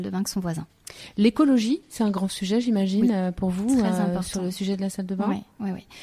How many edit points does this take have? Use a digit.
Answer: 0